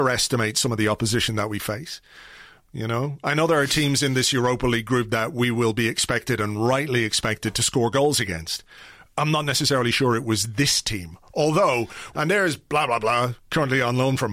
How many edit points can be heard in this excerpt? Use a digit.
1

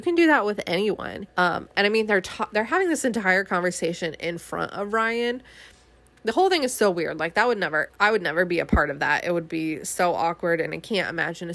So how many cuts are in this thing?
2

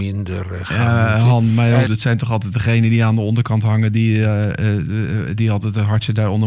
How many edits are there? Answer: 1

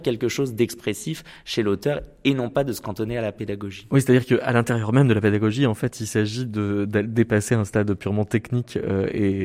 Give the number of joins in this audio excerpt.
0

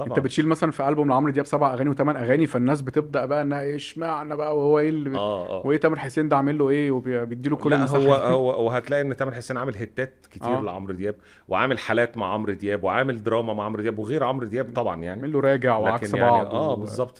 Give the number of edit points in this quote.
0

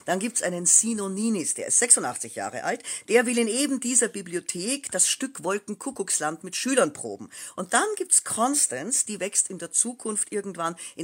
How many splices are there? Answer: 0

